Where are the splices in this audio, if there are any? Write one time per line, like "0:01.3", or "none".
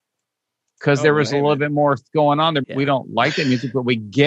0:02.6